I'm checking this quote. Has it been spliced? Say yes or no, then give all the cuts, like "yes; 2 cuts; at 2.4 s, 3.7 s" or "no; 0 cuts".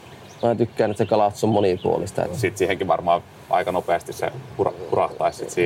yes; 1 cut; at 2.3 s